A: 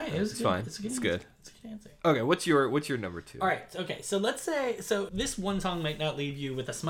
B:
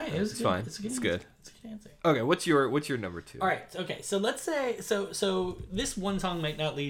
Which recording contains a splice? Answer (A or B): A